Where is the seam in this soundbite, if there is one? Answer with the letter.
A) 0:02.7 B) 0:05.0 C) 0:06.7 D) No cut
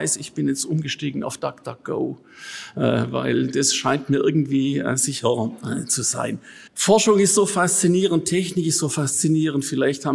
C